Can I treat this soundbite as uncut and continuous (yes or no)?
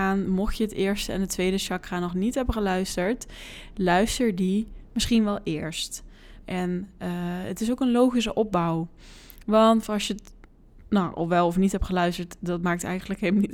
no